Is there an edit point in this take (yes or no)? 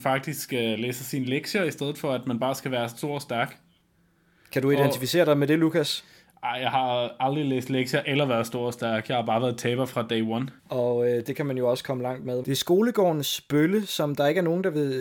yes